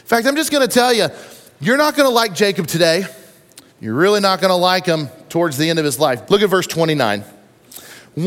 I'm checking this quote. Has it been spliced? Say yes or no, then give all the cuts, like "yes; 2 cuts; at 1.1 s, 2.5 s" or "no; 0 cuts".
yes; 2 cuts; at 3.7 s, 6.3 s